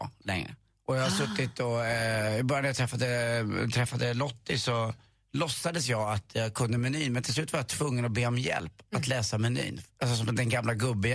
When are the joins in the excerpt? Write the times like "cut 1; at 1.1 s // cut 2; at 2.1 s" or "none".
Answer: none